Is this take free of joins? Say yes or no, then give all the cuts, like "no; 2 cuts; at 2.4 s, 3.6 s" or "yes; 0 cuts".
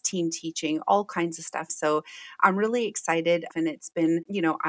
no; 2 cuts; at 1.7 s, 3.5 s